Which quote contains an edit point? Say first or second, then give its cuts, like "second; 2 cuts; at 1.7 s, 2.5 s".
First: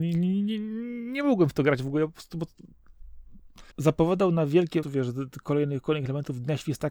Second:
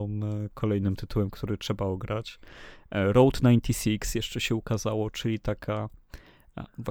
first; 2 cuts; at 3.7 s, 4.8 s